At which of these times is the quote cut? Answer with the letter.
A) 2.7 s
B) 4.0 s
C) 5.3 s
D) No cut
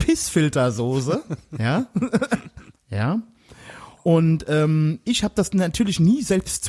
A